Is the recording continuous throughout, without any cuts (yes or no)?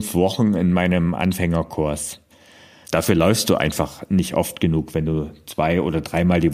no